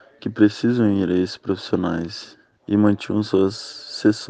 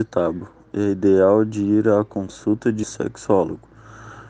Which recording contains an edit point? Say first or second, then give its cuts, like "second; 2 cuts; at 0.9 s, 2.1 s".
second; 1 cut; at 2.8 s